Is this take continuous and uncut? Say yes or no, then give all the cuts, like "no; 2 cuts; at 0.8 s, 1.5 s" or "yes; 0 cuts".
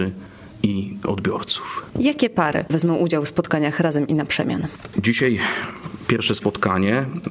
yes; 0 cuts